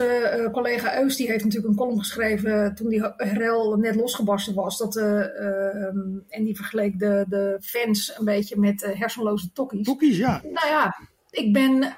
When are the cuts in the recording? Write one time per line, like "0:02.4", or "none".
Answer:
0:10.4